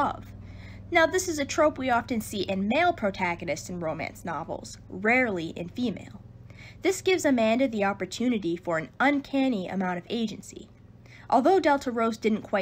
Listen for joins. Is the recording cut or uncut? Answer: uncut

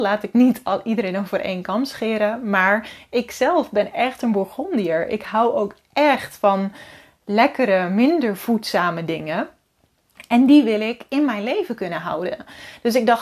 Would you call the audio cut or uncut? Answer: uncut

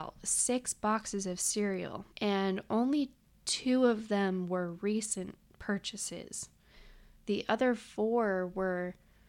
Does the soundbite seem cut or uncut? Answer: cut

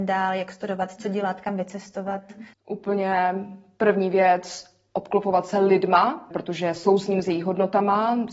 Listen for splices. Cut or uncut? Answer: cut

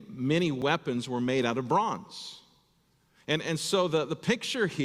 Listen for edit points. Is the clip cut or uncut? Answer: uncut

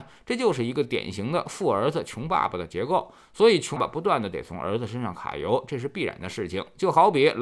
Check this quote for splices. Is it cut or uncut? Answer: cut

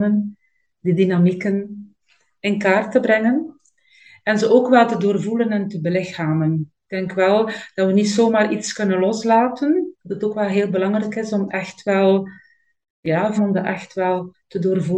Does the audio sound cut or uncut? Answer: cut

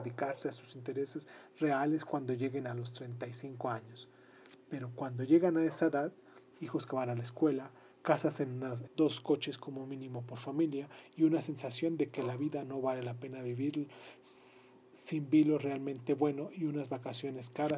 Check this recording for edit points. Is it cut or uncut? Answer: cut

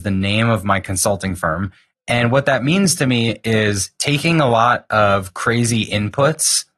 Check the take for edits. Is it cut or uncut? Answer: cut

